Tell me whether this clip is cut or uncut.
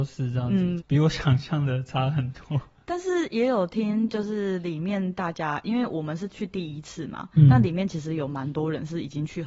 uncut